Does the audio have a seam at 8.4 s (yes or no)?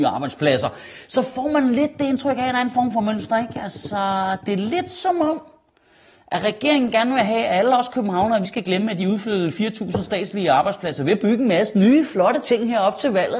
no